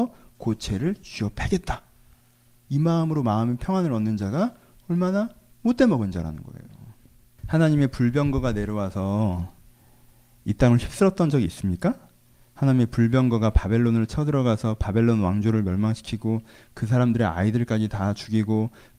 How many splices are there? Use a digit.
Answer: 1